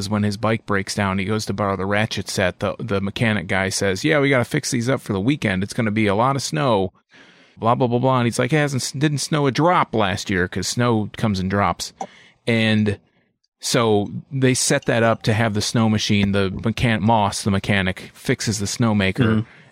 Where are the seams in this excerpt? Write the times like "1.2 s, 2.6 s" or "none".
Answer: none

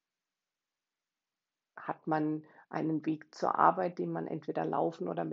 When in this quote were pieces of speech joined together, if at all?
1.6 s

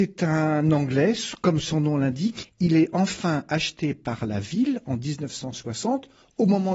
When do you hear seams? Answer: 2.4 s

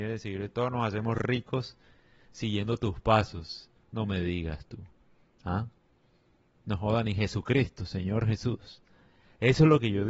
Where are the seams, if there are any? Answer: none

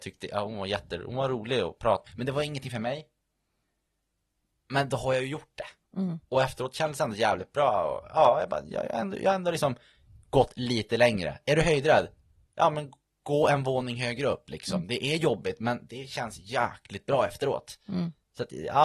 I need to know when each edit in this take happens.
2.1 s

